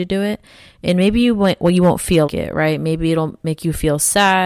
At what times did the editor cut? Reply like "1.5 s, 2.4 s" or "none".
2.3 s